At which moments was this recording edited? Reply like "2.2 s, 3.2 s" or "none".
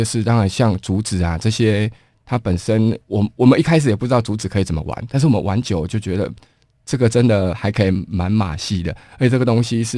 7.5 s